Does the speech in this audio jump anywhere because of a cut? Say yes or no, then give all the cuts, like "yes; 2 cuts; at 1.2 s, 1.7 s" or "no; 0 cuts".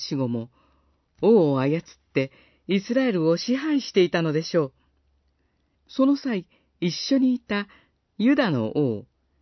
yes; 1 cut; at 5.7 s